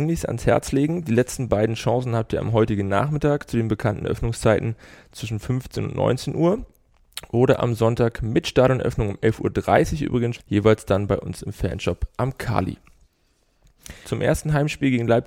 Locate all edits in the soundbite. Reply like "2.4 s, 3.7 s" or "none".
10.3 s, 14.0 s